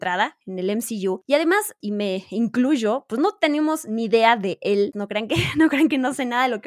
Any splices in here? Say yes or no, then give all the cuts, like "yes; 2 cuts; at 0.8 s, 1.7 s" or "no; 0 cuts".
yes; 2 cuts; at 1.8 s, 4.9 s